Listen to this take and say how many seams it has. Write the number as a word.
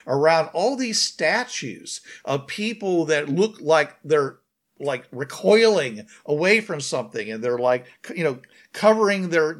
zero